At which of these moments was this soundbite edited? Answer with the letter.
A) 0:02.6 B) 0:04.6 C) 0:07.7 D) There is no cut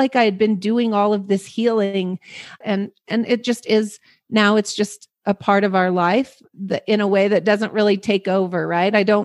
A